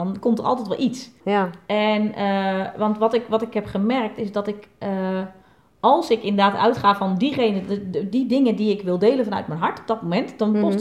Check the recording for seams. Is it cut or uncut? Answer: cut